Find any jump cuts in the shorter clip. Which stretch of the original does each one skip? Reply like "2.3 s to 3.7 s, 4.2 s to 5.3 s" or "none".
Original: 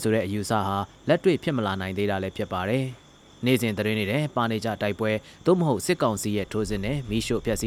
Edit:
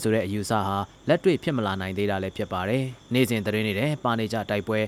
3.0 s to 3.3 s